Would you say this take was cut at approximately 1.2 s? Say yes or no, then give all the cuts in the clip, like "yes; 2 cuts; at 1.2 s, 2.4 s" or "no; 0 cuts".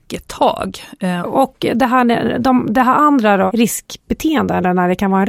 yes; 1 cut; at 1.2 s